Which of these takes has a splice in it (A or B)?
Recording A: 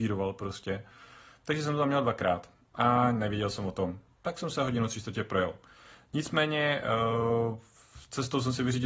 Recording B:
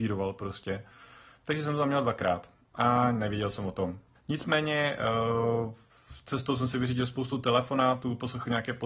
B